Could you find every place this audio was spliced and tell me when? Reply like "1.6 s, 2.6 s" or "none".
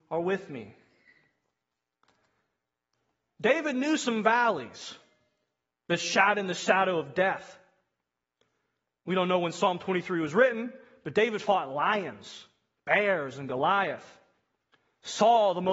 none